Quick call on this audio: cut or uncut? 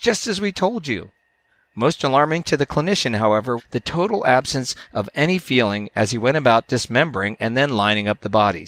cut